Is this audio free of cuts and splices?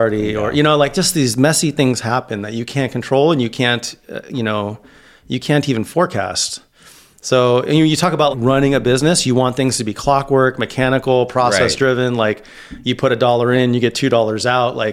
no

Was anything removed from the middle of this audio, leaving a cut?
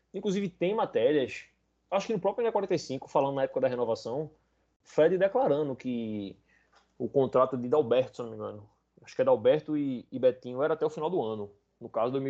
no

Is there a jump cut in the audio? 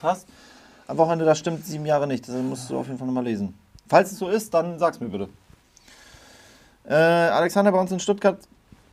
no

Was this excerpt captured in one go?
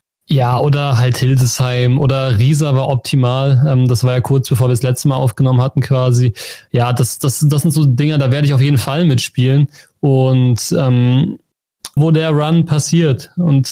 no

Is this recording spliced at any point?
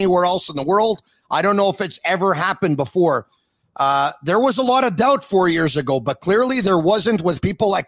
no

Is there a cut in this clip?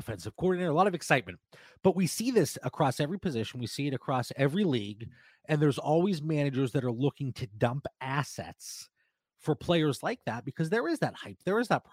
no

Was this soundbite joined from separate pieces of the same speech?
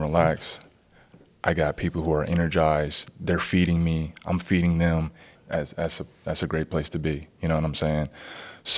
yes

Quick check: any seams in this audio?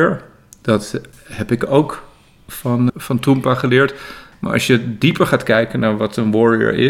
yes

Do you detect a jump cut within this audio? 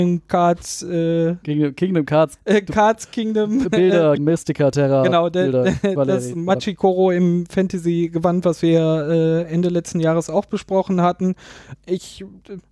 yes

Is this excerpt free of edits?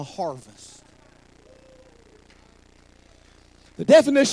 yes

